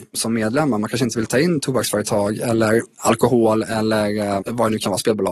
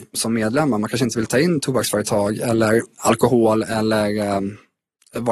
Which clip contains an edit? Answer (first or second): first